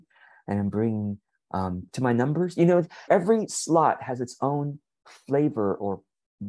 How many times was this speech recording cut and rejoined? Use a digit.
2